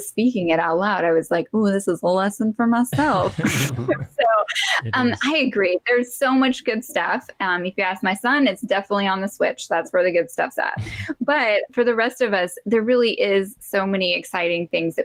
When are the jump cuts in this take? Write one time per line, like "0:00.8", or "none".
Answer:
0:11.7